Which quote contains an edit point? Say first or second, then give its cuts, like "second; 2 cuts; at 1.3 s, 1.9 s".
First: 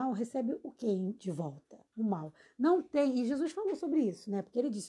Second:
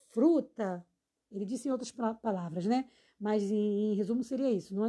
first; 1 cut; at 1.9 s